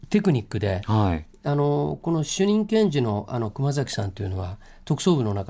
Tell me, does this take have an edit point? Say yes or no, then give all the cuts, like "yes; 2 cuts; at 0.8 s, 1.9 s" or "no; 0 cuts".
no; 0 cuts